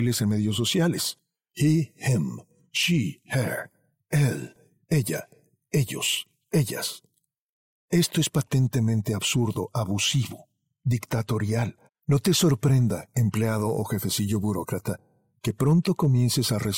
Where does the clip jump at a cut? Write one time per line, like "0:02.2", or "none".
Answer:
0:07.7
0:11.9